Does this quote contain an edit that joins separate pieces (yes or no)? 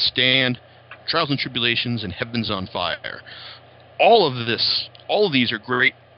no